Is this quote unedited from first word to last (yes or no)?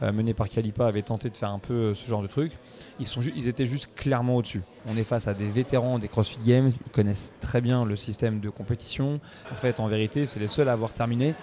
no